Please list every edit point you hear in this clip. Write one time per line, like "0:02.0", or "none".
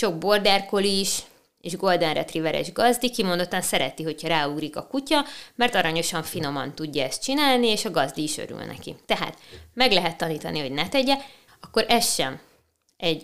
0:09.0
0:11.5